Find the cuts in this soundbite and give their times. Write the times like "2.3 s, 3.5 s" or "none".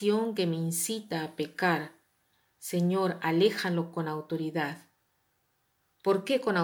none